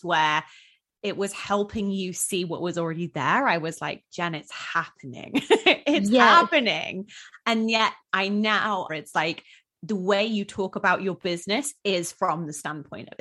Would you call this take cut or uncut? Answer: cut